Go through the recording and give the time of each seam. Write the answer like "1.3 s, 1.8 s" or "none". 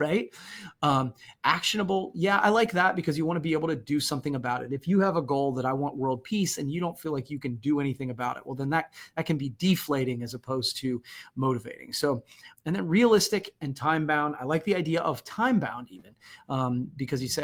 12.6 s